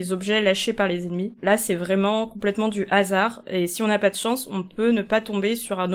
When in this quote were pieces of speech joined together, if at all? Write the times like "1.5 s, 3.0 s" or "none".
none